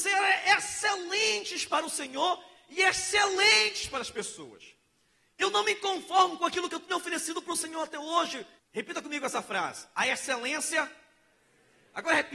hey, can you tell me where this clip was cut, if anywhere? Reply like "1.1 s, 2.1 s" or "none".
8.6 s